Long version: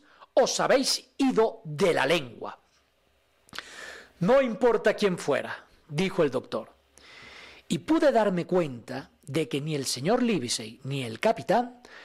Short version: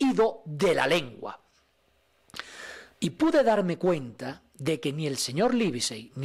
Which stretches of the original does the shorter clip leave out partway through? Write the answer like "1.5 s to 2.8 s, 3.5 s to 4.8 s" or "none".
4.1 s to 7.6 s

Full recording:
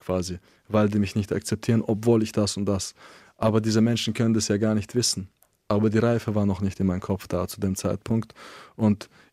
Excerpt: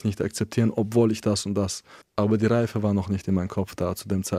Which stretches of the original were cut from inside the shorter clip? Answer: 3.1 s to 5.5 s

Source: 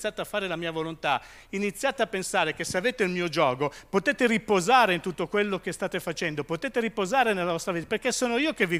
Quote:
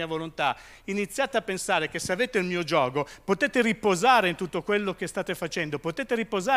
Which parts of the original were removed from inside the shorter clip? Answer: none

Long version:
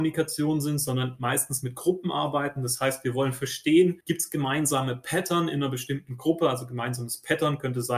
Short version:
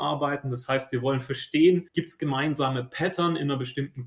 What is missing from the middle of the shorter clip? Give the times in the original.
none

